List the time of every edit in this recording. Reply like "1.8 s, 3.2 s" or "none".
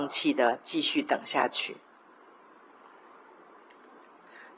none